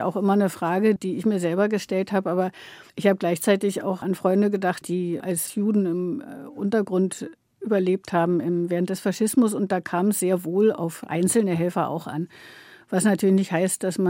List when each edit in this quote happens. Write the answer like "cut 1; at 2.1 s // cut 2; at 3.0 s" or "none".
cut 1; at 1.0 s // cut 2; at 2.9 s // cut 3; at 4.8 s